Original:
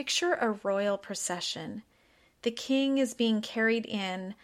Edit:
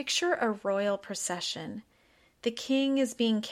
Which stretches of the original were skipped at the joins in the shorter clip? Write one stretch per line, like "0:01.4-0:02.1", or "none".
none